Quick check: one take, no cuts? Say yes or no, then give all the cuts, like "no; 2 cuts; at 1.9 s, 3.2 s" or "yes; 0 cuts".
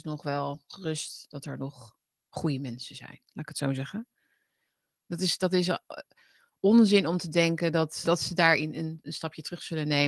no; 2 cuts; at 4.9 s, 8.0 s